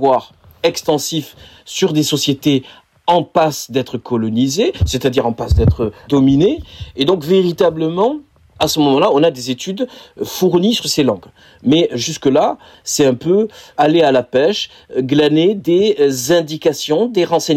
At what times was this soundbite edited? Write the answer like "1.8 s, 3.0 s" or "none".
12.7 s